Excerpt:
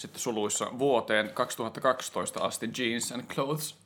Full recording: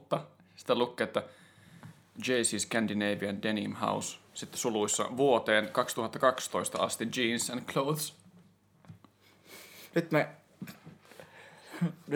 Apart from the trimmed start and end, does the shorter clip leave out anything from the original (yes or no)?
no